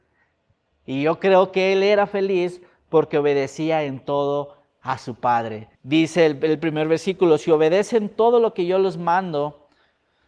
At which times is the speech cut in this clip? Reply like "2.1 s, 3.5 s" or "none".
5.7 s